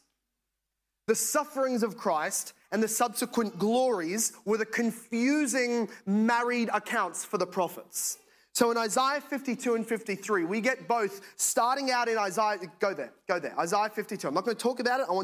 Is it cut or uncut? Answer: uncut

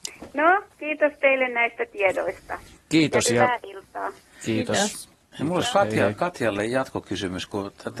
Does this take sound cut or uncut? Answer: uncut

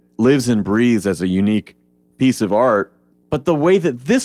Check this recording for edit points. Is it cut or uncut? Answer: cut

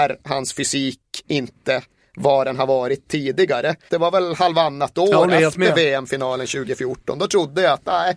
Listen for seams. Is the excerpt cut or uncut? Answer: cut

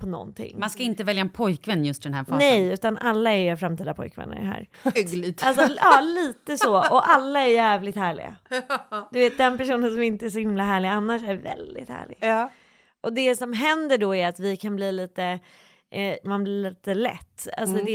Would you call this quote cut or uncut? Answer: cut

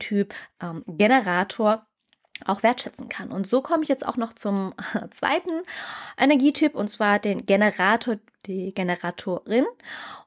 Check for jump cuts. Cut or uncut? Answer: uncut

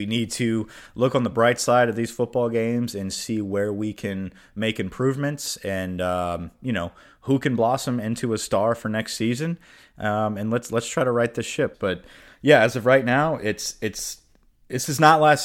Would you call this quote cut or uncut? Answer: cut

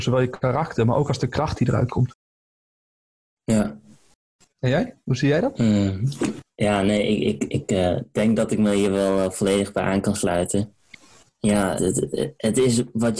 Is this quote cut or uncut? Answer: cut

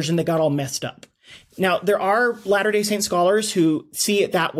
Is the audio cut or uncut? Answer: uncut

